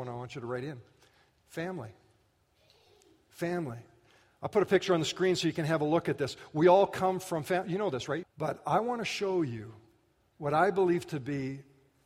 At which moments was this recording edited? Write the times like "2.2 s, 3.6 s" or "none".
8.2 s